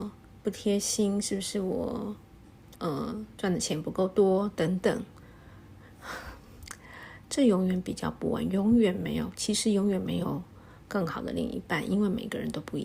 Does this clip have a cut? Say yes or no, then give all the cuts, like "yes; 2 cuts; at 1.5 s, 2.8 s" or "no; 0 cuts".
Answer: yes; 1 cut; at 2.7 s